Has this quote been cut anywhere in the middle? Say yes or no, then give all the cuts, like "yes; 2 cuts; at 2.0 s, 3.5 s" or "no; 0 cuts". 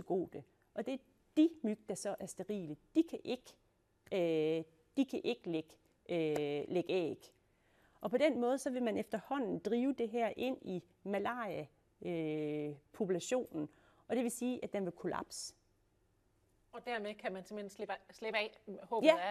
no; 0 cuts